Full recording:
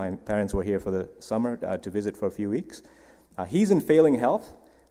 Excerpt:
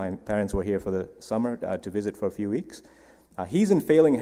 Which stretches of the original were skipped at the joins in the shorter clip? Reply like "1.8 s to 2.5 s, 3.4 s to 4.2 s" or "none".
none